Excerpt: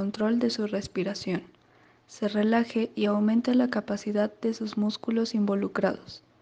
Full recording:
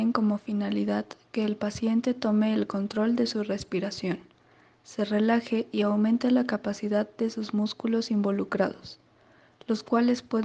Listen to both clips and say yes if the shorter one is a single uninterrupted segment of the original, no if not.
yes